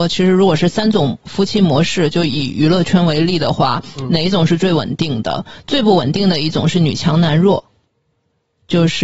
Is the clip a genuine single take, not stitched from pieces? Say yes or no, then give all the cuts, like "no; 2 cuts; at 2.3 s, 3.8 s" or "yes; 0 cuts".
yes; 0 cuts